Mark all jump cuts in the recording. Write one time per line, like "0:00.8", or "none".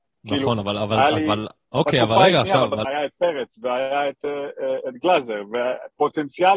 0:02.8